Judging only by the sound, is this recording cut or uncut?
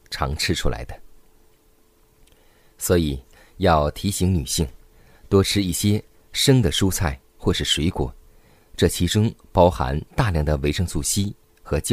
uncut